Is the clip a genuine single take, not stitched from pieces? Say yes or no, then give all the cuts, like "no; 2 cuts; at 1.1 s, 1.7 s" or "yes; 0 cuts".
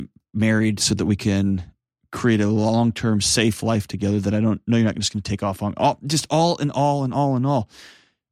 yes; 0 cuts